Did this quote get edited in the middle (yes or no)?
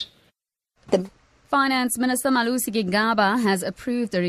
no